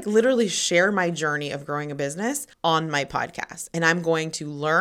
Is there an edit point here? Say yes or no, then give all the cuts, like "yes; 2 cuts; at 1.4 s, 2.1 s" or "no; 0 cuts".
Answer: yes; 1 cut; at 2.5 s